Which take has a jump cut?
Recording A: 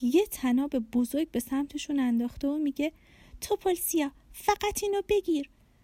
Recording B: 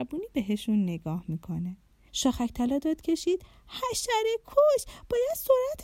B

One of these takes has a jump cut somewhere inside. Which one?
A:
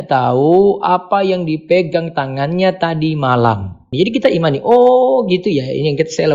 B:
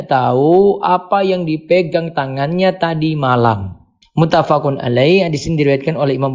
A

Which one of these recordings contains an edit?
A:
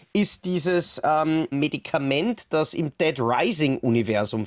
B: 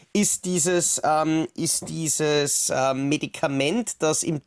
A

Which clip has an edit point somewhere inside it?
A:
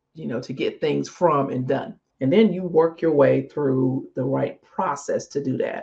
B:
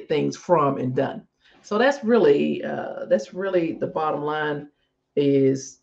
A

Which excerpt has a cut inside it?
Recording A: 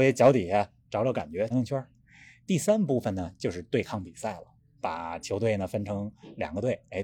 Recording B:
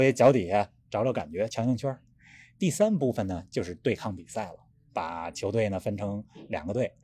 A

